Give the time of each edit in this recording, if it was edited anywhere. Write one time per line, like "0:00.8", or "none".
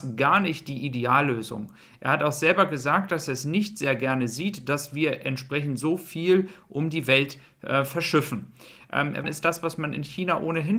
0:09.2